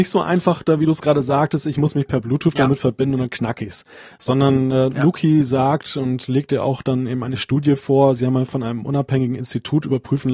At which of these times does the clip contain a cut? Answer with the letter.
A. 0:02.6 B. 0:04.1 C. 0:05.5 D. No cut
D